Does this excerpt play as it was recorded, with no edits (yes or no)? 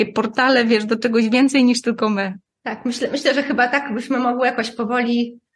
no